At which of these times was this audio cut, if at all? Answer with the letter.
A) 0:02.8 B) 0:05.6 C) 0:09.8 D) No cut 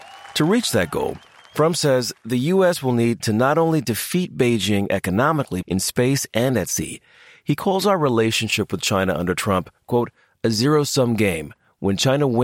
B